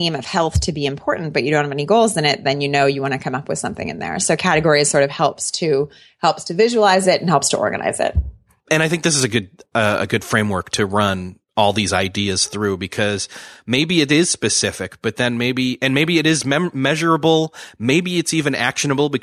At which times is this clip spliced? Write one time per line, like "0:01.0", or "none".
none